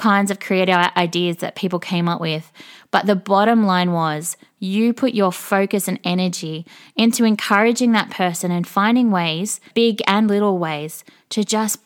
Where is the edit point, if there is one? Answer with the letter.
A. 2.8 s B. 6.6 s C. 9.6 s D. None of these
D